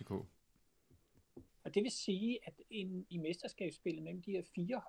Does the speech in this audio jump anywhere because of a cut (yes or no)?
yes